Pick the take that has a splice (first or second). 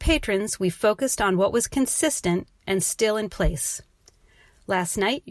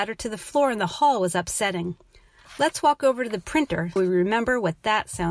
second